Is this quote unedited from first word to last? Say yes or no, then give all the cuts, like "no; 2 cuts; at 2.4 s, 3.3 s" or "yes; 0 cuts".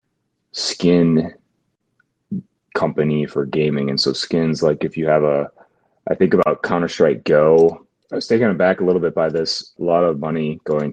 no; 2 cuts; at 8.0 s, 9.8 s